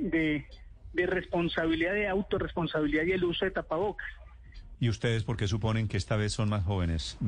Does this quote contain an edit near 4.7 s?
yes; 1 cut; at 4.7 s

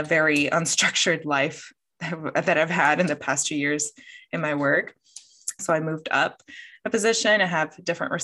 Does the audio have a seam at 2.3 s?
no; 1 cut; at 5.6 s

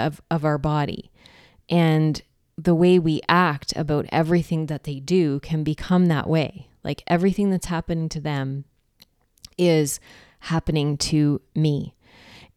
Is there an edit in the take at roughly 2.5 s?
yes; 1 cut; at 2.5 s

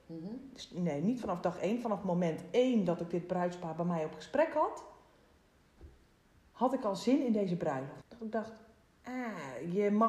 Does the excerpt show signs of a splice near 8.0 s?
yes; 1 cut; at 8.0 s

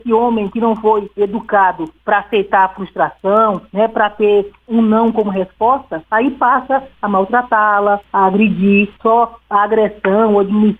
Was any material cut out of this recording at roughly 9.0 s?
yes; 1 cut; at 9.0 s

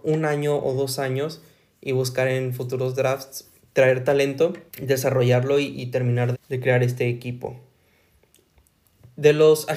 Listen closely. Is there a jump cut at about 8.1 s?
no; 2 cuts; at 4.7 s, 6.3 s

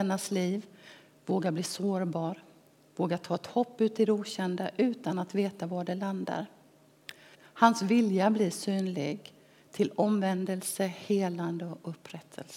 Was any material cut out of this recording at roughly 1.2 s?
no; 1 cut; at 7.3 s

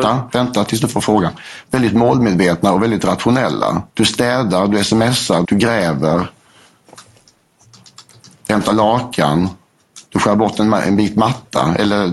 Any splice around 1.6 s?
no; 3 cuts; at 3.9 s, 5.4 s, 10.1 s

